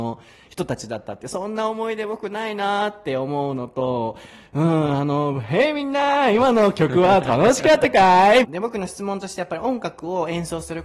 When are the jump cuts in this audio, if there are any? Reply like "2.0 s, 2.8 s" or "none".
8.4 s

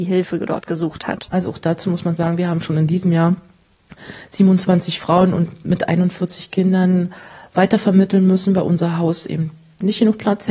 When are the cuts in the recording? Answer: none

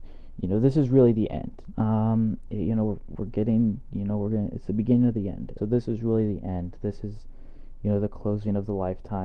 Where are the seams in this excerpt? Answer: 1.7 s, 5.6 s

